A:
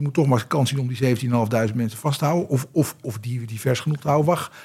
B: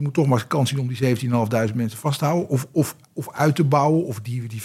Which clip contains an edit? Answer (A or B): A